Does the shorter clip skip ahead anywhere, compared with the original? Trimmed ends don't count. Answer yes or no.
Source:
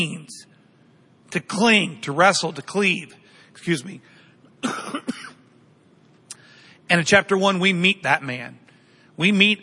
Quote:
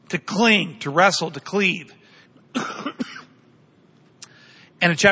yes